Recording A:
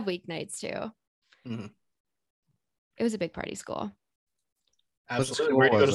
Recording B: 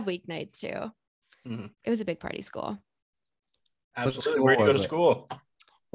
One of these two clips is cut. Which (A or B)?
B